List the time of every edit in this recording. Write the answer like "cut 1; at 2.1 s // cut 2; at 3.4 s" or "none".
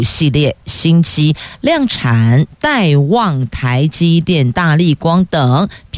cut 1; at 2.5 s